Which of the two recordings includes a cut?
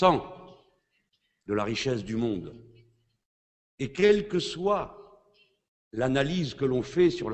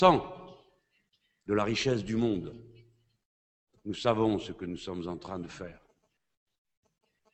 second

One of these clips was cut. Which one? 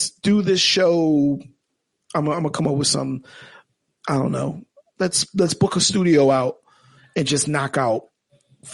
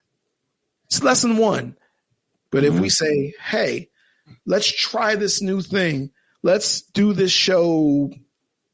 second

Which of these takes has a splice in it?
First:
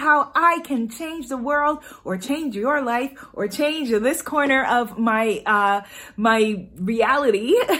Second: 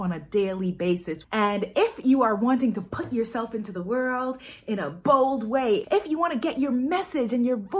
second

